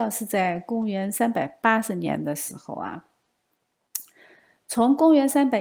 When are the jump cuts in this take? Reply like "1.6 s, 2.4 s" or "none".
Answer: none